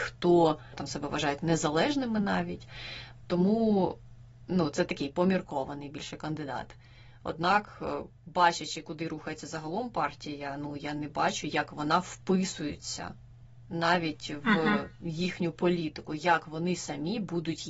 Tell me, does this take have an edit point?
no; 0 cuts

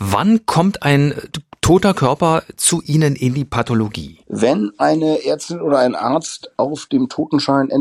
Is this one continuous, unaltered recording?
no; 1 cut; at 4.2 s

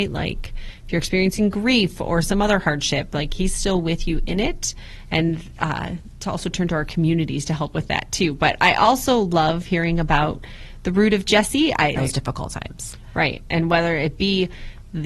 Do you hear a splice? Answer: yes; 1 cut; at 12.0 s

